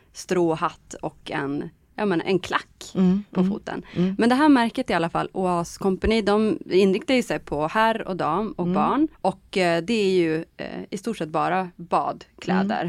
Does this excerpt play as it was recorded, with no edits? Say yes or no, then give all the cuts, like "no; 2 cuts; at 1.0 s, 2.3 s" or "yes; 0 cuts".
no; 2 cuts; at 2.2 s, 9.1 s